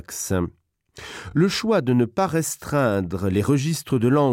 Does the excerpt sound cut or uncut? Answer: uncut